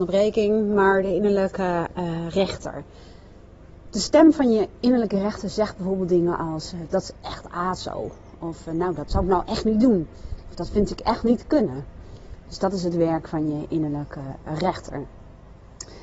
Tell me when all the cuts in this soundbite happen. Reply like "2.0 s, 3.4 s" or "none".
none